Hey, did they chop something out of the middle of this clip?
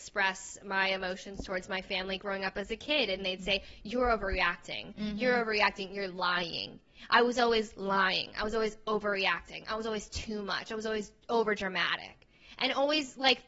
no; 0 cuts

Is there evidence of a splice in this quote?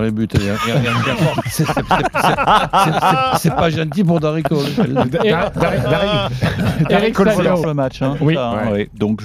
yes; 1 cut; at 7.6 s

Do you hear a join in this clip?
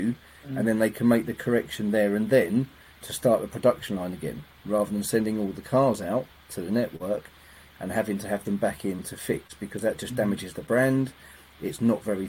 no; 0 cuts

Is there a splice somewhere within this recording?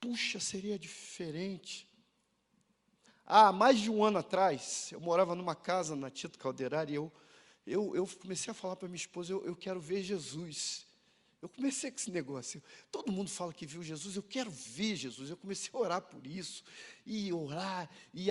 no; 0 cuts

